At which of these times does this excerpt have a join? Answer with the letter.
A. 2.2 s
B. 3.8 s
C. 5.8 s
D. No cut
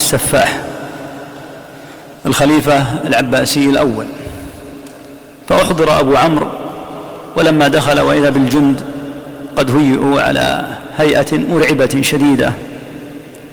A